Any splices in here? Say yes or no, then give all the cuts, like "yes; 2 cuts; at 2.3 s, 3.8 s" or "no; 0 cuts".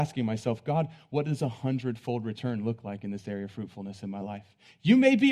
no; 0 cuts